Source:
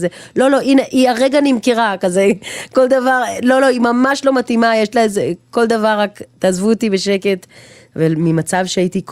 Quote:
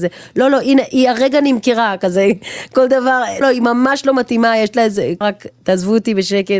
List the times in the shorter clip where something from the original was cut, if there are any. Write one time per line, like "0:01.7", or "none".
0:03.4
0:05.2

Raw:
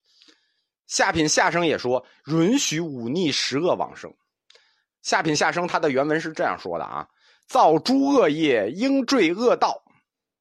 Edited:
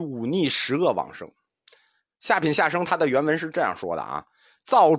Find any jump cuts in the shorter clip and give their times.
none

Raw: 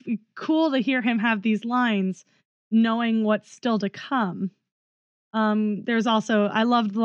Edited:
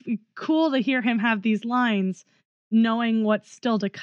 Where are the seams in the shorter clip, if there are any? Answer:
none

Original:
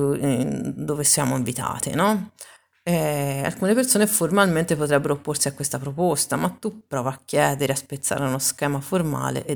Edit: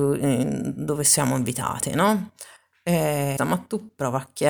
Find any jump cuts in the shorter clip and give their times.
0:03.4

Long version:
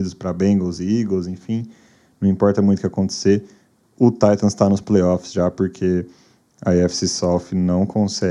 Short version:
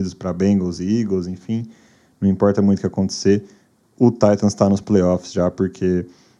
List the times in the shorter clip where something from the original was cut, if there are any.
none

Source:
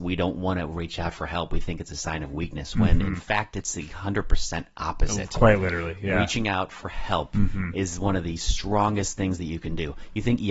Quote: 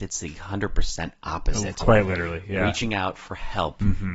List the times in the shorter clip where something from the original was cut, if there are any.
none

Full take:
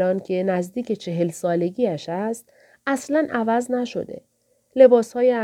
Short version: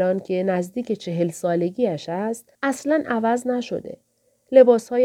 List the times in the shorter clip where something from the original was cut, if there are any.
0:02.5

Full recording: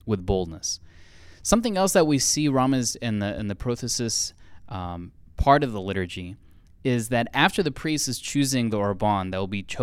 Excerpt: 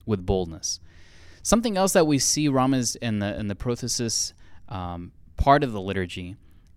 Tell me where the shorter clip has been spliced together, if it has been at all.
none

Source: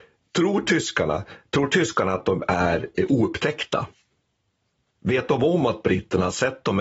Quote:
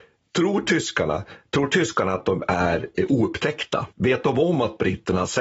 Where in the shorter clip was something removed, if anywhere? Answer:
0:03.9

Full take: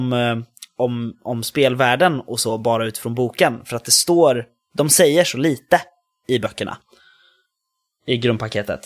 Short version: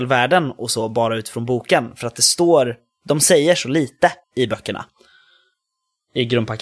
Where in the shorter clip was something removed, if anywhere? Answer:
0:04.2

